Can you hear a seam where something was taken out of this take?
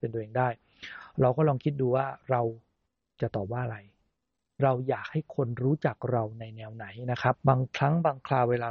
yes; 1 cut; at 7.3 s

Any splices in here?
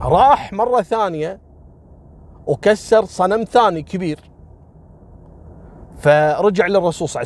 no; 0 cuts

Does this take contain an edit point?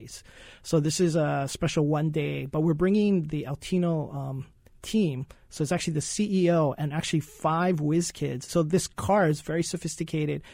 yes; 1 cut; at 8.5 s

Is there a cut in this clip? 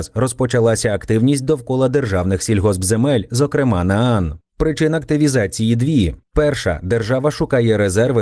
no; 0 cuts

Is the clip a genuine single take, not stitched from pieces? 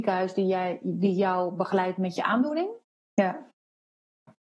no; 1 cut; at 2.9 s

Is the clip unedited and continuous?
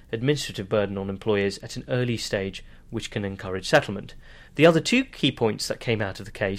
no; 1 cut; at 4.5 s

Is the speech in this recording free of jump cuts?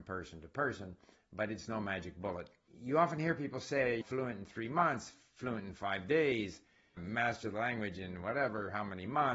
no; 2 cuts; at 4.0 s, 7.0 s

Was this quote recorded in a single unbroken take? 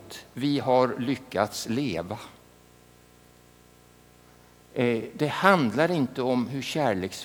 yes; 0 cuts

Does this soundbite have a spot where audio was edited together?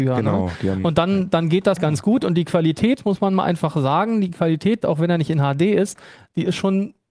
yes; 2 cuts; at 1.8 s, 4.8 s

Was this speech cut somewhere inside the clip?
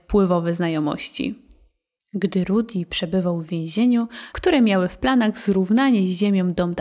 yes; 2 cuts; at 2.0 s, 4.3 s

